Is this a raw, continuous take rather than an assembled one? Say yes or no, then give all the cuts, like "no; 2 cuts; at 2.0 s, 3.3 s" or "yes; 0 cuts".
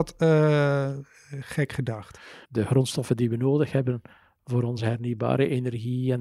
no; 1 cut; at 2.4 s